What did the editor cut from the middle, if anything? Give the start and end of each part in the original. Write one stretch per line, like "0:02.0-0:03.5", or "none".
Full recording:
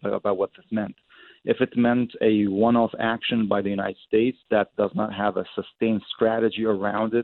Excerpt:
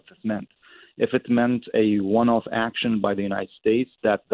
none